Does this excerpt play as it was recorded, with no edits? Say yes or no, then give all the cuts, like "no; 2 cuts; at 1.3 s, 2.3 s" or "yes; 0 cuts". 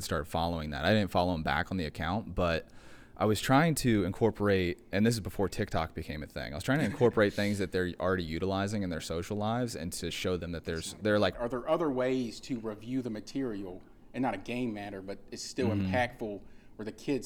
no; 1 cut; at 11.3 s